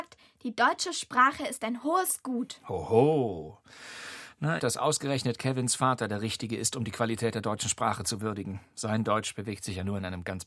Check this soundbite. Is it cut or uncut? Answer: cut